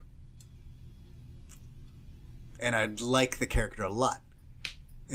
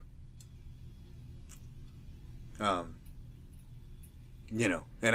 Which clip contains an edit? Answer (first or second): first